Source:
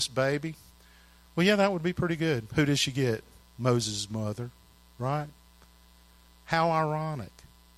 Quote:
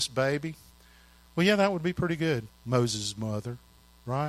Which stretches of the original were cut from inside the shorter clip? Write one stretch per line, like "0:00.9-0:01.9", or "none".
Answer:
0:02.5-0:03.4

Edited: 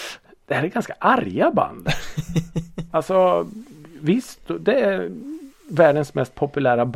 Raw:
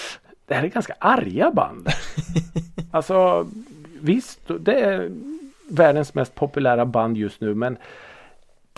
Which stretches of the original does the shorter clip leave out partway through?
none

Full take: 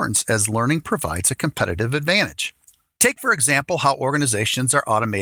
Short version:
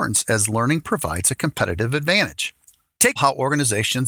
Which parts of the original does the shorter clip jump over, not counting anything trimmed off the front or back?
0:03.2-0:03.8

